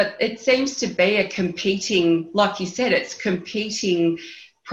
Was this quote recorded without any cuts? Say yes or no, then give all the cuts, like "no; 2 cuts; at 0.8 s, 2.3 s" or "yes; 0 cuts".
yes; 0 cuts